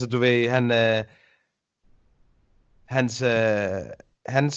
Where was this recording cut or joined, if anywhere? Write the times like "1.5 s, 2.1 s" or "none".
none